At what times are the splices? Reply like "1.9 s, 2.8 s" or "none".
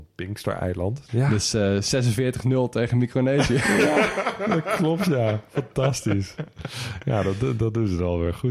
1.1 s